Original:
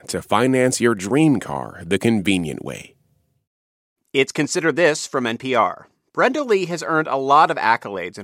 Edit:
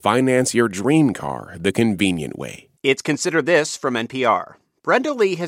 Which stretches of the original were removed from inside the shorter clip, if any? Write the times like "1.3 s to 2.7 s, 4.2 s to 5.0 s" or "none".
3.0 s to 4.1 s